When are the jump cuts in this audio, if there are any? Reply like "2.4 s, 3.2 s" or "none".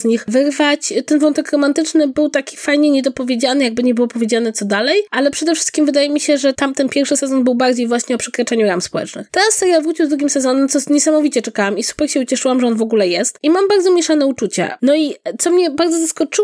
6.5 s, 14.8 s